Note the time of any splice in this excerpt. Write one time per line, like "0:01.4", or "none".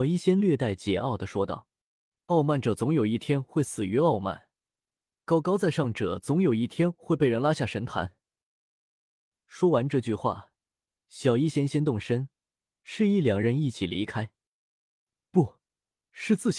0:15.2